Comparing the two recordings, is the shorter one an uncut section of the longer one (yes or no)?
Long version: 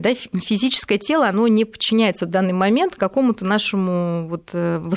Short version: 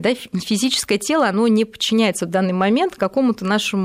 yes